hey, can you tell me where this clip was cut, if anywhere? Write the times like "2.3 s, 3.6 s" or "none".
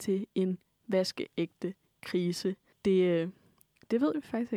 2.7 s